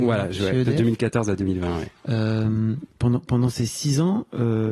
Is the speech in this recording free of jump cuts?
yes; 0 cuts

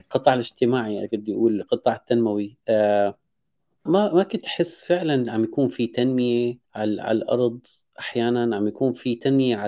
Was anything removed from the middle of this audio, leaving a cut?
yes; 2 cuts; at 3.9 s, 6.6 s

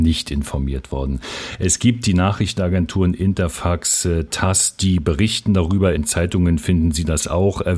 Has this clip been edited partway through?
no; 0 cuts

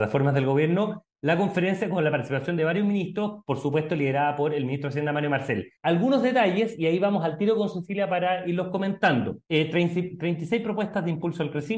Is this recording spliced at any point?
yes; 2 cuts; at 5.8 s, 9.5 s

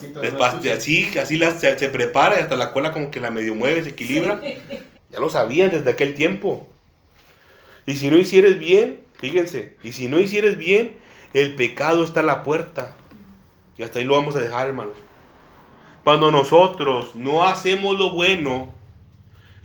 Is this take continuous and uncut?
no; 1 cut; at 4.9 s

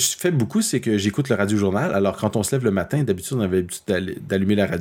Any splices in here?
no; 0 cuts

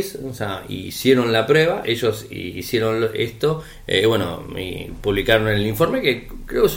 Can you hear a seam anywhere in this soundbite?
yes; 1 cut; at 1.8 s

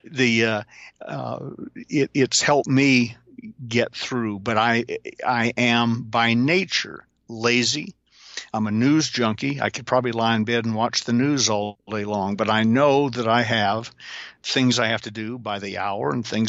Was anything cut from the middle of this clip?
no; 0 cuts

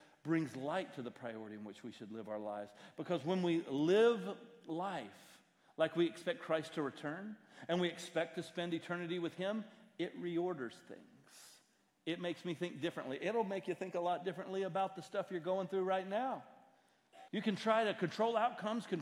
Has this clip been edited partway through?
yes; 1 cut; at 17.3 s

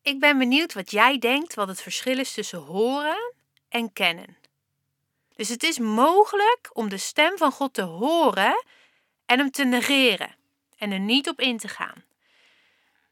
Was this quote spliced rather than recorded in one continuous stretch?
yes; 1 cut; at 5.3 s

